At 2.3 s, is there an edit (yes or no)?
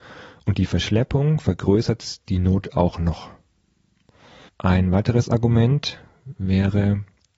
no